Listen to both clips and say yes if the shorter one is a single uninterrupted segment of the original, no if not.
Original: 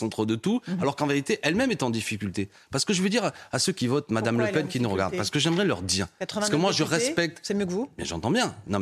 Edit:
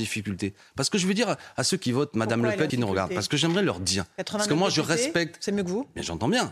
no